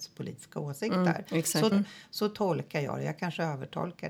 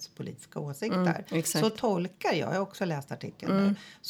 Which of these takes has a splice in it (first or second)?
first